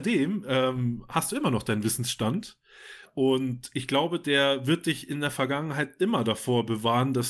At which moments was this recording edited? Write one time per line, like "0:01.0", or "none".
none